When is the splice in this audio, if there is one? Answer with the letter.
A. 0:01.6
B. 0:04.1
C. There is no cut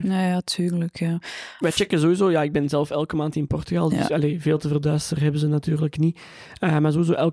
A